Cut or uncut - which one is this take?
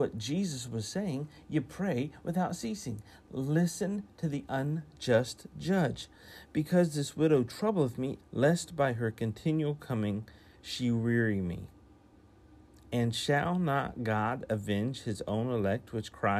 cut